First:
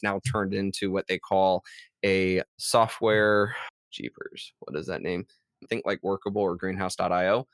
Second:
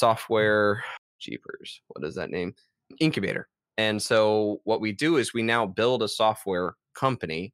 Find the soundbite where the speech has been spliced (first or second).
first